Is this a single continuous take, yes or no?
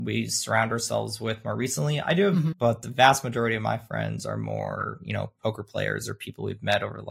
no